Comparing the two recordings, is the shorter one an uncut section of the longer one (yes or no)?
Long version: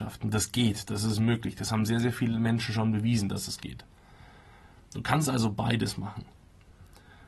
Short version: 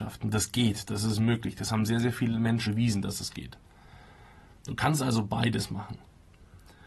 no